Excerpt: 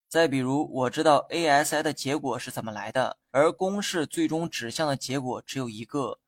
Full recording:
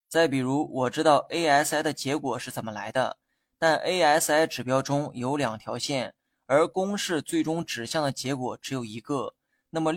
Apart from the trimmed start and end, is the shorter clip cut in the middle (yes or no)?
yes